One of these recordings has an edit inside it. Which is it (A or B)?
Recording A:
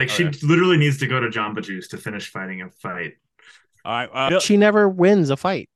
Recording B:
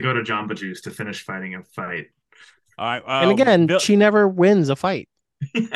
A